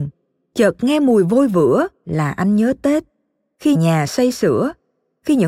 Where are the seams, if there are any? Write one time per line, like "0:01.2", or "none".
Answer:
0:03.7

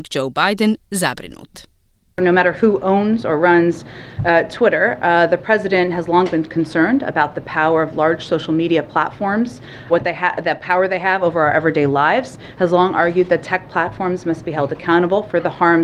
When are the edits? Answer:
0:09.9

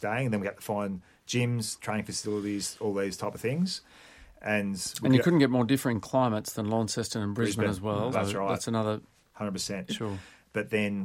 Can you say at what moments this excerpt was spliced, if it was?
0:08.1
0:09.9

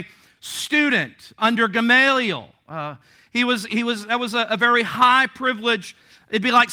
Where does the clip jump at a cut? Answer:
0:01.4

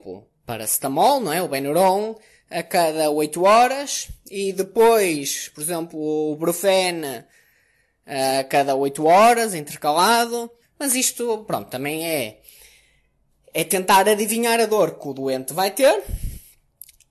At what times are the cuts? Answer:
0:10.6

